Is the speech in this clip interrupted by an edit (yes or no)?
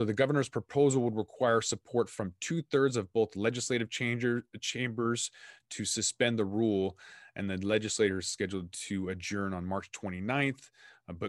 no